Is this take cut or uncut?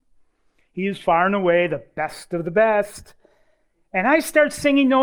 uncut